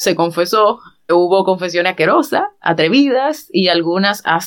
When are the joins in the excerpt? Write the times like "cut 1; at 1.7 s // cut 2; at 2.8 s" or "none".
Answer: cut 1; at 1.1 s

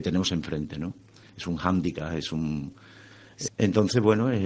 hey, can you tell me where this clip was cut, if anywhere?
cut 1; at 3.5 s

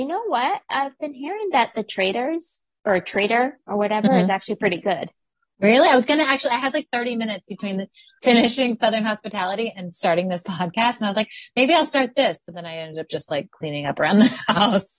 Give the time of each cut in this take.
none

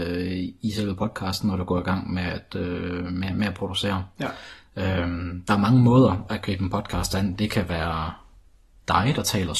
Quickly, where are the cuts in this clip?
none

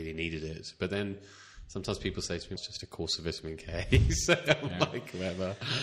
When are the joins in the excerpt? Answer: cut 1; at 2.6 s

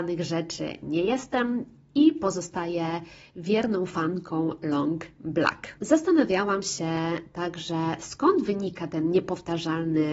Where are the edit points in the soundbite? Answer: none

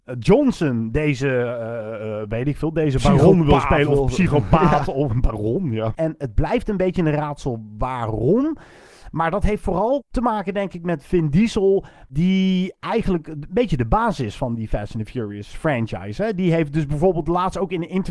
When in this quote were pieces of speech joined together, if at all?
cut 1; at 5.9 s

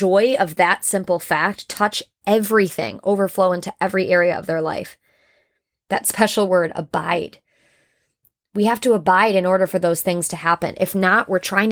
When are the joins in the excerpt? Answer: cut 1; at 5.8 s

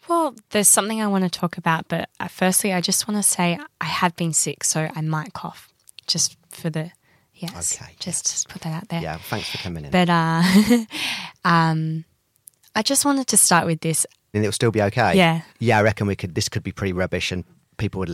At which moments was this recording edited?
cut 1; at 14.3 s // cut 2; at 15.5 s

